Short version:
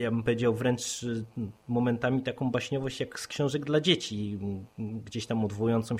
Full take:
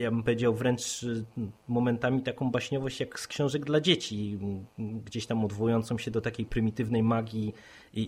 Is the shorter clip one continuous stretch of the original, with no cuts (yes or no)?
yes